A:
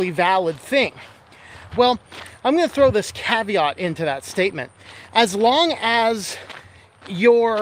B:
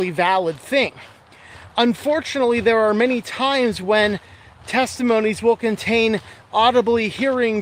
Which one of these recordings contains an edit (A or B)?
A